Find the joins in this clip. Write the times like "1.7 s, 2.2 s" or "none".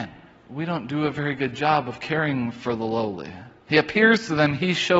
3.6 s